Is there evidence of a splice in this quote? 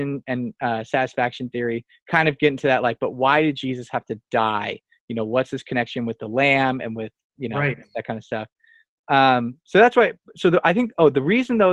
no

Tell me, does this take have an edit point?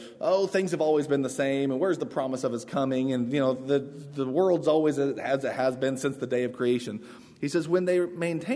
no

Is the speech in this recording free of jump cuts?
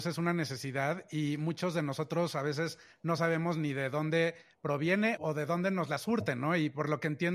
no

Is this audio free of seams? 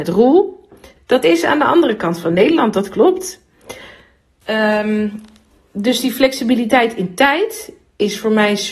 no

